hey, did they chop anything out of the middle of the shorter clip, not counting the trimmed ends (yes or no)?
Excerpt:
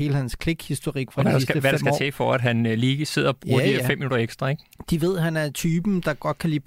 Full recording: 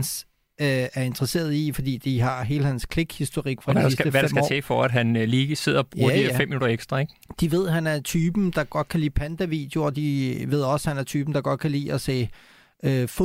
no